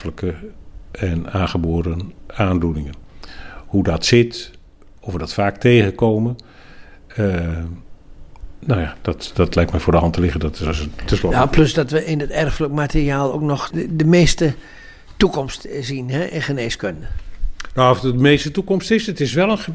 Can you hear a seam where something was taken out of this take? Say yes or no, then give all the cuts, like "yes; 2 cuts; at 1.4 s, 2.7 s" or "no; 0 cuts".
yes; 1 cut; at 13.7 s